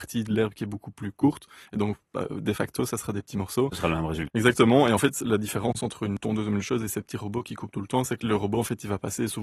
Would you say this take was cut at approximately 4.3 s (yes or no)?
yes